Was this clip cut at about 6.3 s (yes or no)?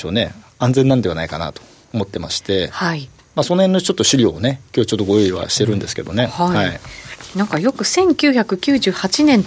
no